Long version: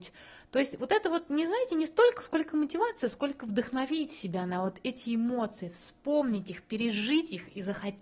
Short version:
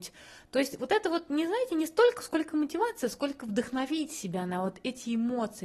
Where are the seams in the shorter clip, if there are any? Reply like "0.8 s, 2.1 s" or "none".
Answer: none